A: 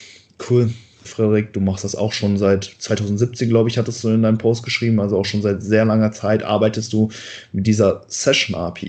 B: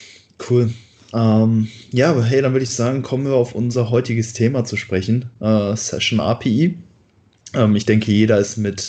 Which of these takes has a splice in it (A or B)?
A